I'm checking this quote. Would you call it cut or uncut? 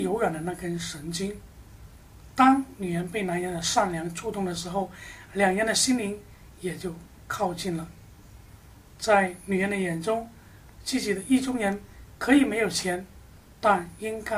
uncut